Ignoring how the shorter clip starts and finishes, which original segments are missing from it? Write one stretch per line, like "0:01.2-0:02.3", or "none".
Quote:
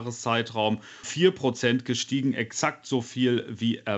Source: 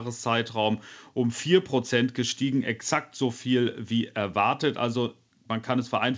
0:01.0-0:01.3